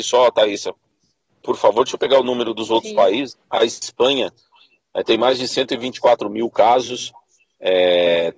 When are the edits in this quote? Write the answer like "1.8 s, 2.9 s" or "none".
3.4 s